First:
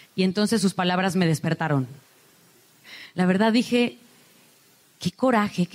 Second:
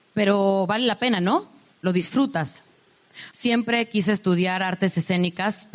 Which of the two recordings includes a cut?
second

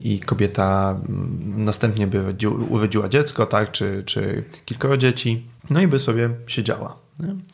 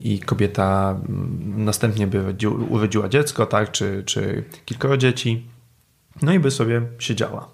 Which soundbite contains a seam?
first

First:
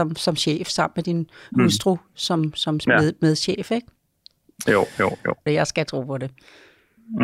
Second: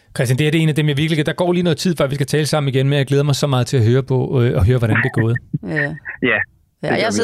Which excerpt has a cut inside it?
first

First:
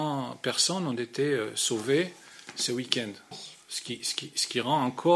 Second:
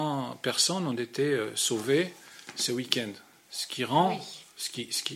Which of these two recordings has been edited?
first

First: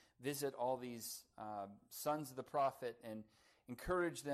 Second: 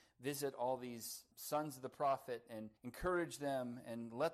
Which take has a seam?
second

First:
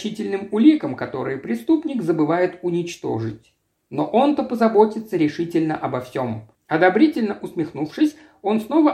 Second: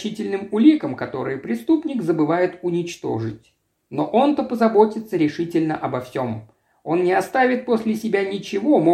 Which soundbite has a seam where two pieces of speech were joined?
first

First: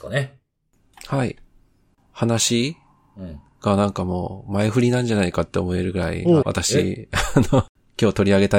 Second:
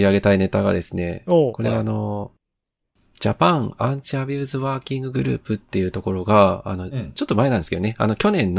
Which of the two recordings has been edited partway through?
first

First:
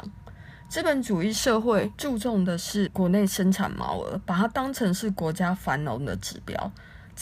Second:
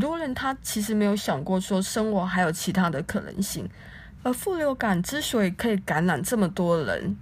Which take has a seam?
second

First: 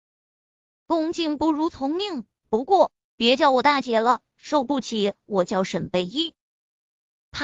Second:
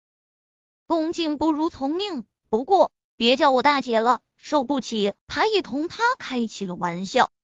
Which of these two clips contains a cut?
second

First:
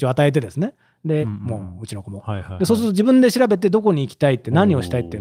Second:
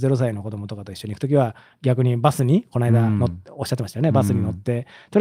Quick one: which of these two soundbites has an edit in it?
first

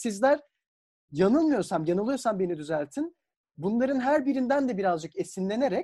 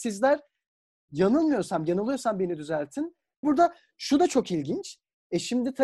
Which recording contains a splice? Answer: second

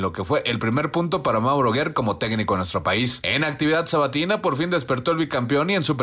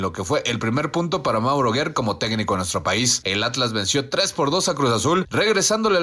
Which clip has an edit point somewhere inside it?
second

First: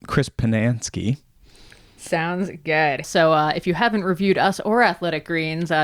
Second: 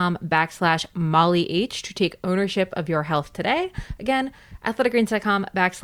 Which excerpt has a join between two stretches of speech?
first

